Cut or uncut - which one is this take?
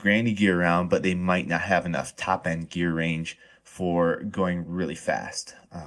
uncut